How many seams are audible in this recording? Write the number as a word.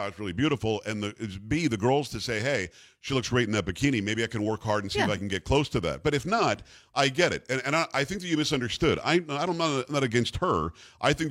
zero